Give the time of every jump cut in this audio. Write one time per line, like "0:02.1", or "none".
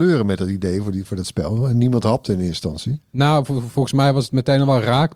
none